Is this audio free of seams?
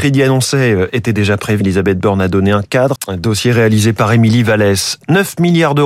no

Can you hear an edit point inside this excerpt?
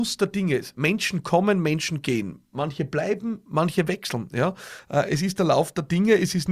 no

